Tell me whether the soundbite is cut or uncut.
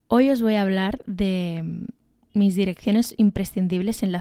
uncut